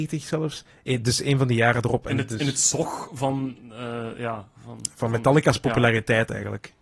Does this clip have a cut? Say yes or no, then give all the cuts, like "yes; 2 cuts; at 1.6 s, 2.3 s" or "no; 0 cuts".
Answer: no; 0 cuts